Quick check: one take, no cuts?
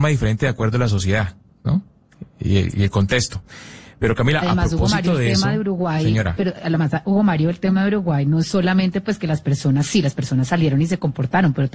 yes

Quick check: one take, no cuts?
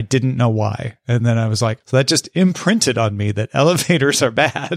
no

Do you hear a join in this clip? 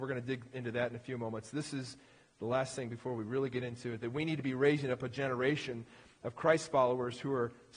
no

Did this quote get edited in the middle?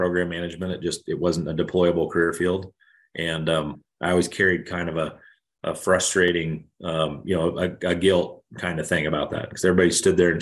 no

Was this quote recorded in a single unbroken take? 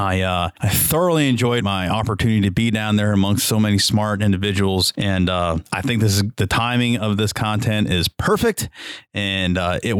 no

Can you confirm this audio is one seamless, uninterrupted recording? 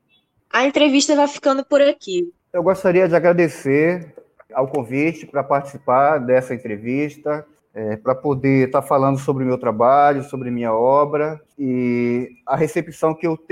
no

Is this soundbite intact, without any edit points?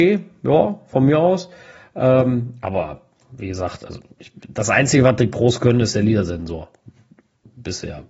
yes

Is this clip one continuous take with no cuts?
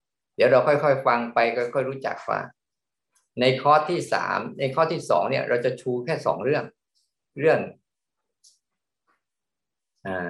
no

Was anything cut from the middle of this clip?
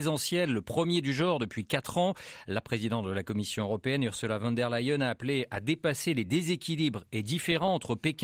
no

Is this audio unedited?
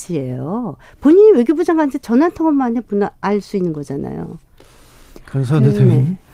yes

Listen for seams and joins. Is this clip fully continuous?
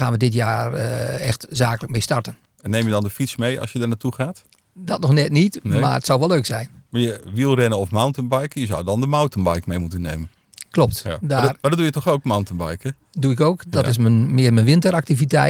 yes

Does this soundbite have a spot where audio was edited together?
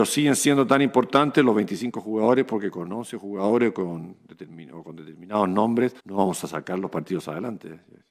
yes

